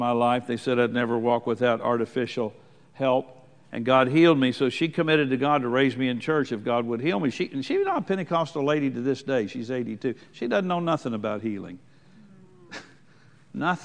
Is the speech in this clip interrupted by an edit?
no; 0 cuts

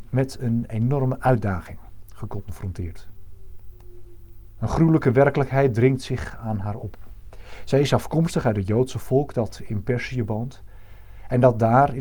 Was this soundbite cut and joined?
no; 0 cuts

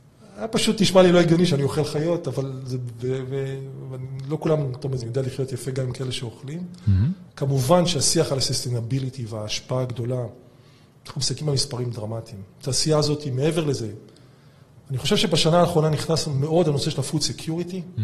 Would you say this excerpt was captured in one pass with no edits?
no; 2 cuts; at 5.0 s, 7.3 s

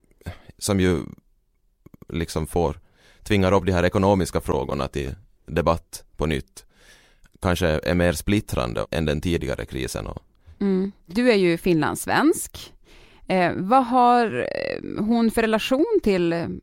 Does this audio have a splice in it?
no; 0 cuts

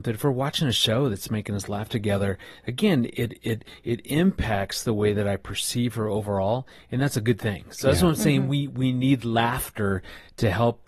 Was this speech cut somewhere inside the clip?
no; 0 cuts

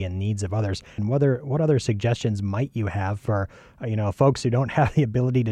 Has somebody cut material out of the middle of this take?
yes; 1 cut; at 1.0 s

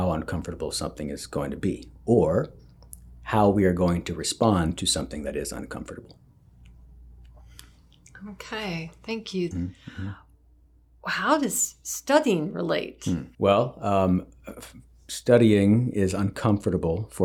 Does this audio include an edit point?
yes; 2 cuts; at 9.5 s, 13.3 s

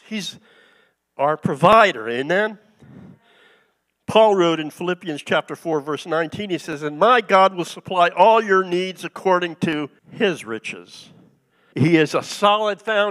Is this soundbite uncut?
no; 2 cuts; at 10.0 s, 11.7 s

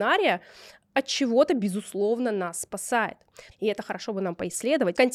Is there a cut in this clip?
yes; 1 cut; at 3.5 s

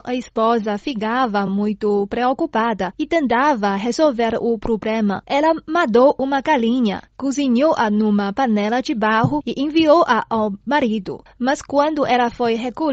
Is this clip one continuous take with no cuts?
yes; 0 cuts

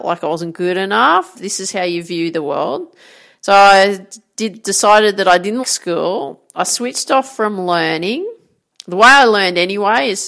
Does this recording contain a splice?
yes; 3 cuts; at 1.3 s, 5.6 s, 8.7 s

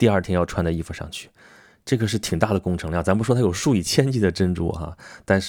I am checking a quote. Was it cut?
no; 0 cuts

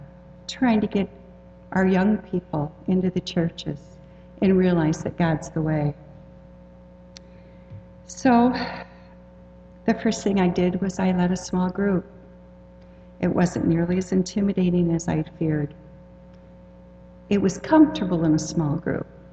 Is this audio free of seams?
yes; 0 cuts

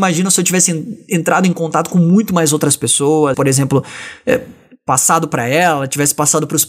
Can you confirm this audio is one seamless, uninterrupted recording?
no; 1 cut; at 3.3 s

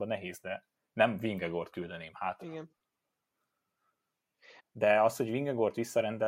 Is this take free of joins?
no; 1 cut; at 4.6 s

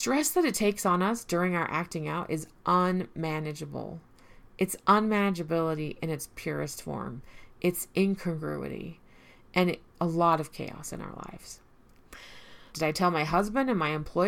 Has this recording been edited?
yes; 2 cuts; at 9.9 s, 12.7 s

